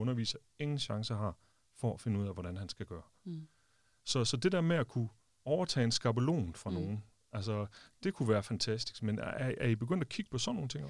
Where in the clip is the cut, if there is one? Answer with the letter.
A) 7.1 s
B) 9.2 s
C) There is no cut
C